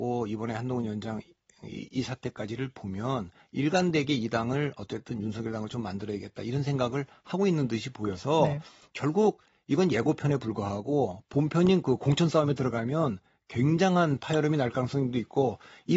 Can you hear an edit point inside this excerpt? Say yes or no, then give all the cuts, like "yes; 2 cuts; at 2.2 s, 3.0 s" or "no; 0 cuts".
no; 0 cuts